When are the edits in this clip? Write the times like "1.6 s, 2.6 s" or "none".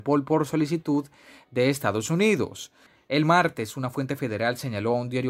3.1 s